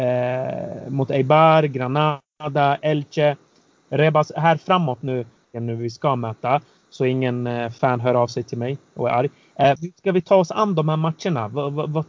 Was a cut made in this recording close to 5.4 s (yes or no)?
yes